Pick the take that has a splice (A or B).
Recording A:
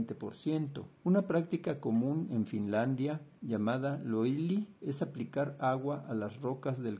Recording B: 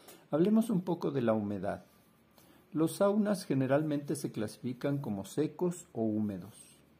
A